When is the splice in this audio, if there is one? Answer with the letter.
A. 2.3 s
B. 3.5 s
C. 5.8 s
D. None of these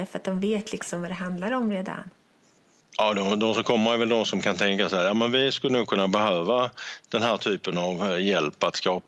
D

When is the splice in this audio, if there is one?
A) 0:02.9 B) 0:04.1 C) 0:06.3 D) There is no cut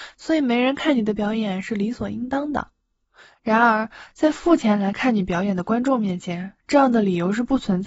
D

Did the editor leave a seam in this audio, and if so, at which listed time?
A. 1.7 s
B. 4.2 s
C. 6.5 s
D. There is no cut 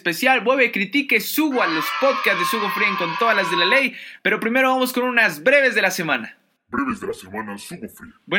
B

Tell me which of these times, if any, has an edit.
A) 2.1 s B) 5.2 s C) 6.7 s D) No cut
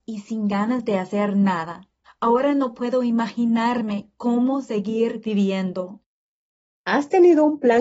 A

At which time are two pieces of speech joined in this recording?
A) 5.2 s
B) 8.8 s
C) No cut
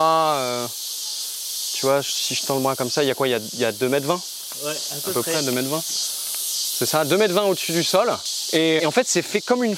B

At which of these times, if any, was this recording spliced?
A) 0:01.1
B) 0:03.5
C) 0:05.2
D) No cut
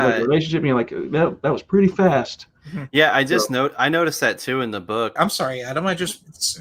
C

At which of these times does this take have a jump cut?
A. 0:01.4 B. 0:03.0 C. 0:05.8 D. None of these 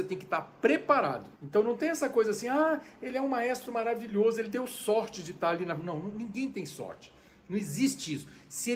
A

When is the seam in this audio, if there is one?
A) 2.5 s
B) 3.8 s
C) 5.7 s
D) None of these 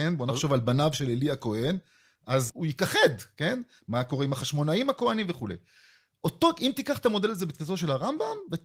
A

